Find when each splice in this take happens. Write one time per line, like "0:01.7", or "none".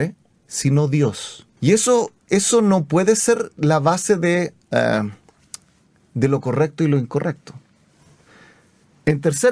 0:01.6

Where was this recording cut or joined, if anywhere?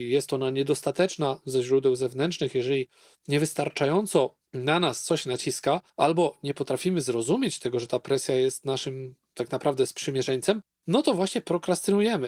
0:05.9

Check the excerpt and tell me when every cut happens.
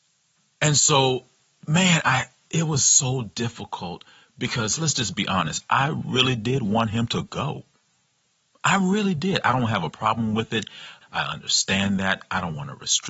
0:11.0

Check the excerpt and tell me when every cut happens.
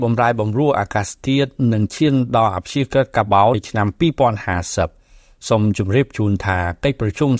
0:03.5

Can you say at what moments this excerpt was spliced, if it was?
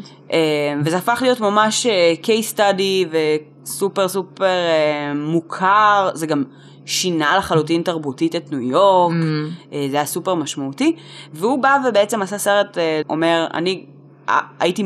0:13.0

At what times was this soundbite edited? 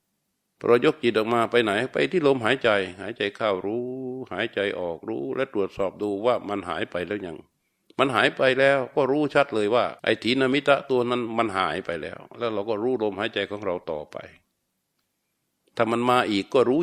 0:10.0

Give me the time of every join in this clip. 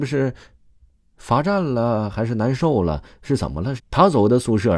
0:03.8

